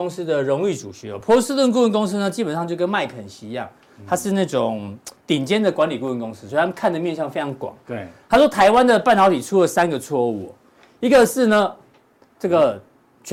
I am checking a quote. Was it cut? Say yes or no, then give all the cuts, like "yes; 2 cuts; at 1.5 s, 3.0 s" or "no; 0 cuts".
no; 0 cuts